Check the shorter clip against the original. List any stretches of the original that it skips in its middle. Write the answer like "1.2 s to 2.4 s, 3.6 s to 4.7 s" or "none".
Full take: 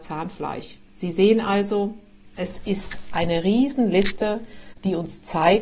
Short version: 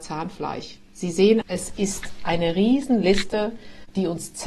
1.4 s to 2.3 s